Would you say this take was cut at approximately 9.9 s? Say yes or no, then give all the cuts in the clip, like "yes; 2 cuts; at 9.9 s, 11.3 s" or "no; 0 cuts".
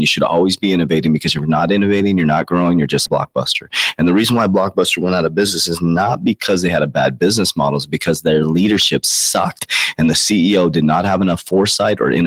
no; 1 cut; at 3.1 s